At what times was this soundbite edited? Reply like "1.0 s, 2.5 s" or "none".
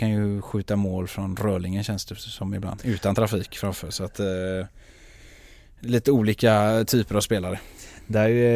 2.8 s

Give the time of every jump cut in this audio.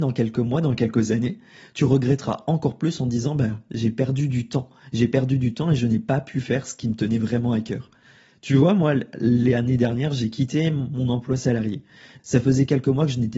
12.2 s

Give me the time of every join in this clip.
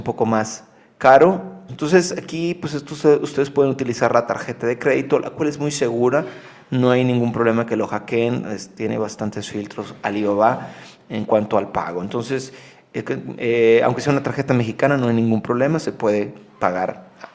1.7 s

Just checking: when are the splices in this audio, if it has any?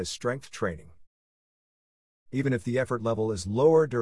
2.1 s

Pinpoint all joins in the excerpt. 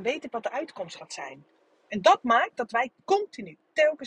2.9 s

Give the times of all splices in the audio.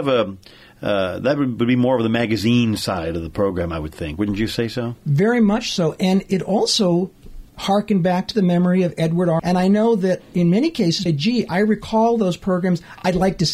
7.5 s, 9.4 s, 11.1 s

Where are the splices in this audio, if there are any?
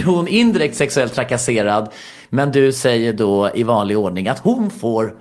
none

